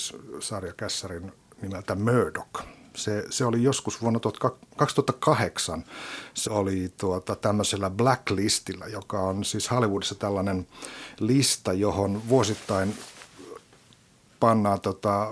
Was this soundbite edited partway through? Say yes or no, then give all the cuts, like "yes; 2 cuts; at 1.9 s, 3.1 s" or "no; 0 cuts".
yes; 1 cut; at 6.4 s